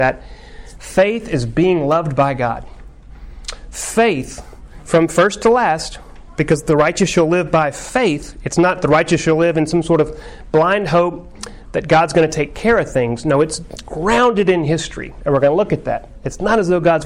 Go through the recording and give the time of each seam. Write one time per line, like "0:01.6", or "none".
none